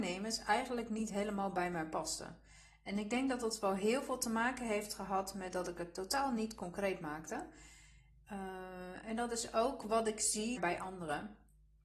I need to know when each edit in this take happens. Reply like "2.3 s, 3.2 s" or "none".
10.6 s